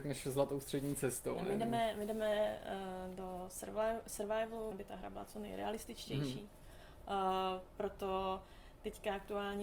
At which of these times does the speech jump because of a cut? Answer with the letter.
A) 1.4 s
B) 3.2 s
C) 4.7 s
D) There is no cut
C